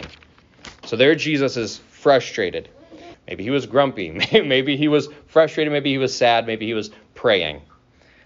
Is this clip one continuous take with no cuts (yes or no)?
no